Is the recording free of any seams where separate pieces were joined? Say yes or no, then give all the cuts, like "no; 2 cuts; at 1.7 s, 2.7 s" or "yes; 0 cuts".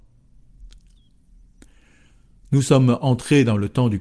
yes; 0 cuts